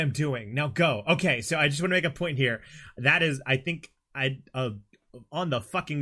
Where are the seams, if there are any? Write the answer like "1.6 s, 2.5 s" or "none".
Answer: none